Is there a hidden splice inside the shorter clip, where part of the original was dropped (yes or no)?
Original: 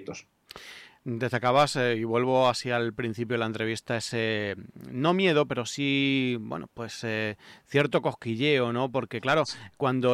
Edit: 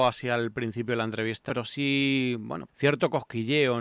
yes